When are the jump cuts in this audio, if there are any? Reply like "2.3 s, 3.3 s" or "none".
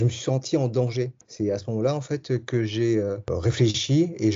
1.2 s